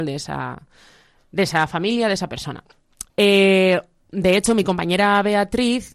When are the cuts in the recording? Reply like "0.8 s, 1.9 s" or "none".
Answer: 3.1 s